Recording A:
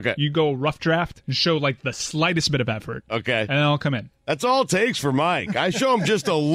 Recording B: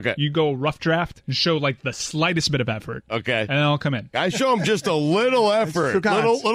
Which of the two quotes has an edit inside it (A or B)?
B